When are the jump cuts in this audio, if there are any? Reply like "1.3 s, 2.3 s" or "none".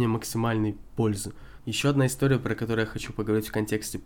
1.6 s